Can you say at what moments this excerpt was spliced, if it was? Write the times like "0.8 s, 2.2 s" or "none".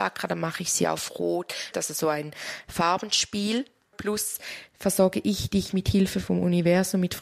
1.7 s, 3.9 s